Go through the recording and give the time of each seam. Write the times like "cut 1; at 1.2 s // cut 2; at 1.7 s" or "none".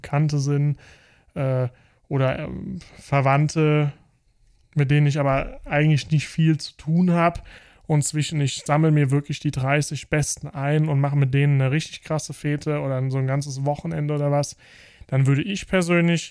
none